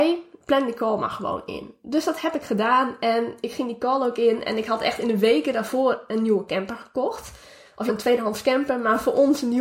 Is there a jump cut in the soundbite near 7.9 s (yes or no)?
yes